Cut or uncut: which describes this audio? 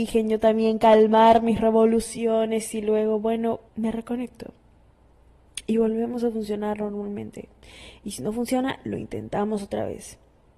cut